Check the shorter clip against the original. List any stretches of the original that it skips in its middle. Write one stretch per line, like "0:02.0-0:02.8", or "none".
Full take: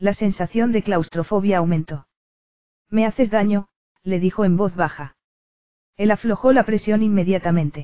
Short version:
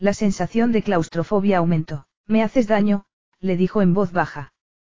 0:02.1-0:02.8